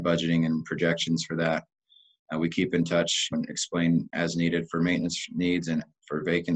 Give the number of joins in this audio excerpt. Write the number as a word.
zero